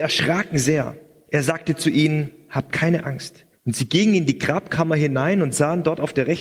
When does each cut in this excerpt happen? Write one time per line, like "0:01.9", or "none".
0:01.3
0:03.5